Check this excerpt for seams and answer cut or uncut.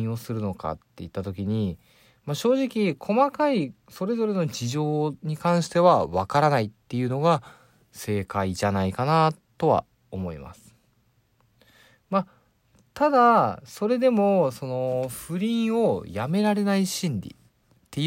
uncut